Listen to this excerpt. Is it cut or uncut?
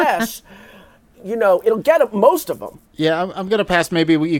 cut